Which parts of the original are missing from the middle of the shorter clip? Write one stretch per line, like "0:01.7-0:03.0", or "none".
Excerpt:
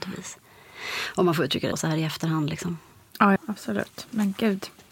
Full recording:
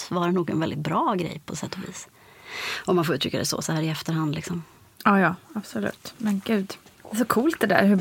0:03.4-0:03.6
0:05.2-0:05.4